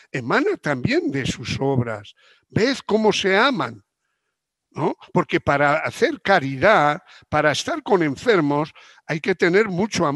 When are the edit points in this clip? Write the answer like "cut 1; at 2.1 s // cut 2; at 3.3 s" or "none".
none